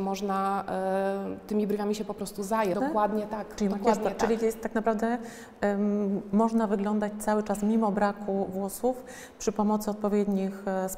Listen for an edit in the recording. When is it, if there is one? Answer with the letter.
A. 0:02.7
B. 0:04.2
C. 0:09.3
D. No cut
A